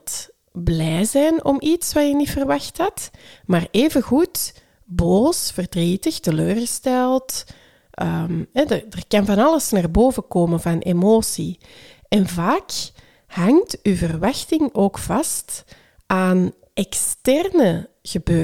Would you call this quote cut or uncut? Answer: uncut